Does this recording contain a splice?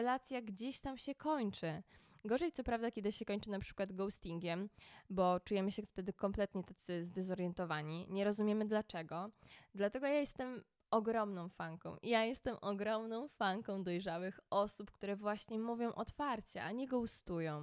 no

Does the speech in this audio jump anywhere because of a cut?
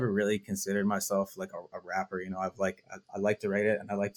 no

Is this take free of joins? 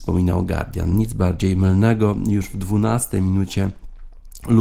yes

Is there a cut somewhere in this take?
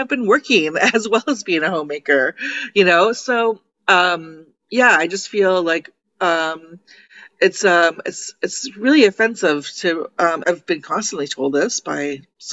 yes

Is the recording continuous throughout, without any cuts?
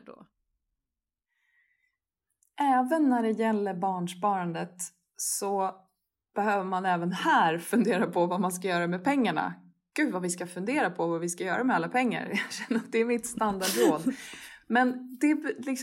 yes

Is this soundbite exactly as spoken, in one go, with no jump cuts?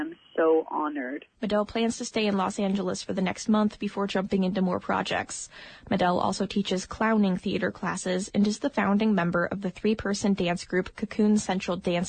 no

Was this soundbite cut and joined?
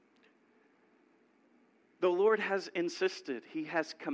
yes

